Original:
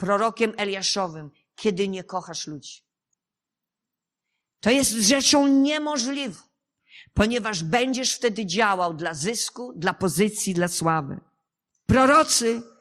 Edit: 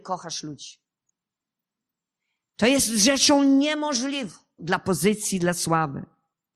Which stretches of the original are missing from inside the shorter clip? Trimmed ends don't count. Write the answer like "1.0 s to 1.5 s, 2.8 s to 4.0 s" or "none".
6.6 s to 9.7 s